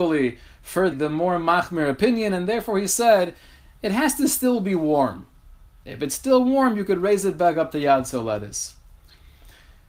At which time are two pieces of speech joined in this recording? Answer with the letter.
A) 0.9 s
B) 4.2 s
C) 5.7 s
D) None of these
A